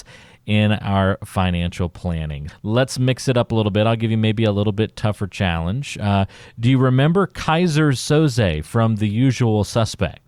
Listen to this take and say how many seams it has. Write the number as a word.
one